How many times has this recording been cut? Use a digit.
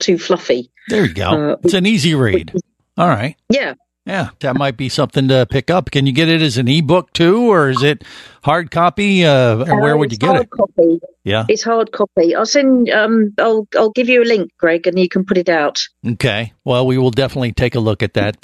2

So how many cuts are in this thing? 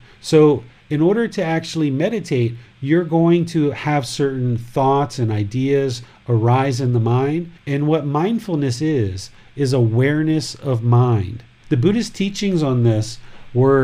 2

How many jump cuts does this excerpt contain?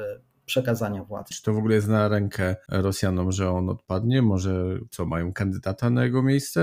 1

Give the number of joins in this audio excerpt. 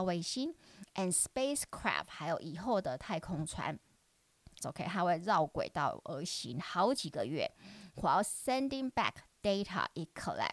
1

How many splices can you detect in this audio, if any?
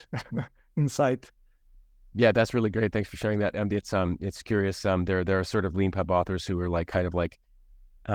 0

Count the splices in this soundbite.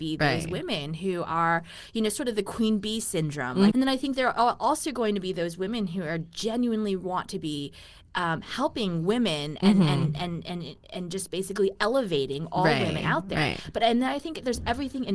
1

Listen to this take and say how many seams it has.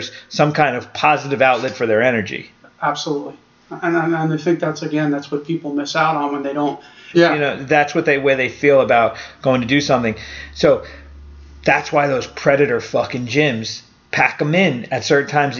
1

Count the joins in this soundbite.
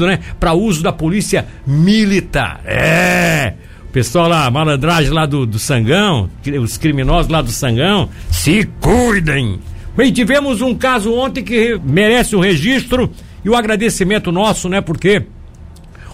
2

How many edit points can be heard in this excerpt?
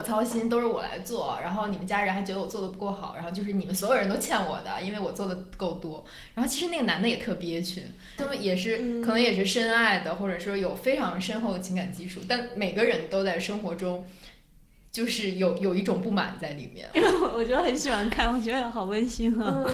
2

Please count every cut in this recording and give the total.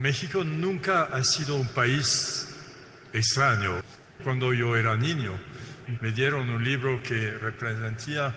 1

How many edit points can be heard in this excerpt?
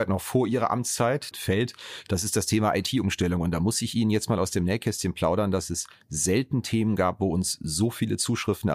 1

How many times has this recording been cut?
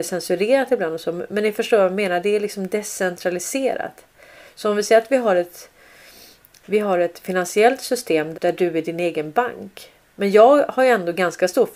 2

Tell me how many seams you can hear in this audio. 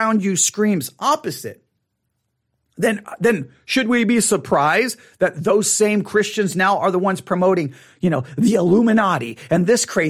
0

